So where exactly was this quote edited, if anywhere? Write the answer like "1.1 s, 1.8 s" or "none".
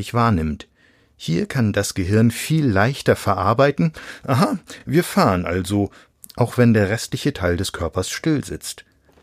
none